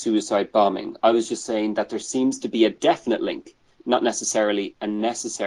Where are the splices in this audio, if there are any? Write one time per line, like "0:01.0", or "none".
none